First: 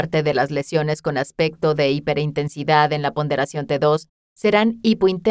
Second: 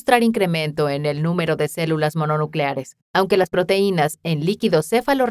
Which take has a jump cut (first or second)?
second